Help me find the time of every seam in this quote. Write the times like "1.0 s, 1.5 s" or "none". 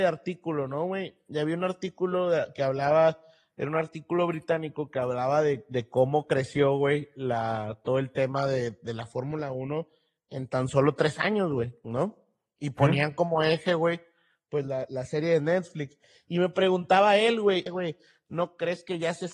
17.7 s

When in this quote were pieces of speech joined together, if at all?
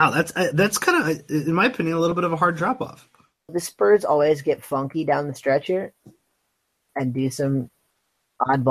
3.5 s, 6.9 s

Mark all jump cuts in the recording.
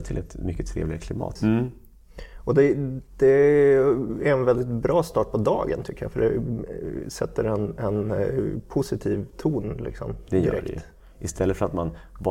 1.4 s

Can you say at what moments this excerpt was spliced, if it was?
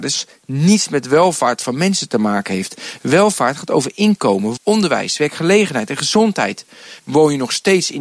4.6 s, 7.0 s

